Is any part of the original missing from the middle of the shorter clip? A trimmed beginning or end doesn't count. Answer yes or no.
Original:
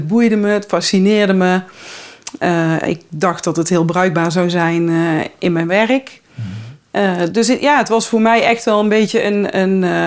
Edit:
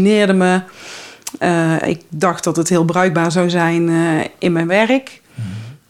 no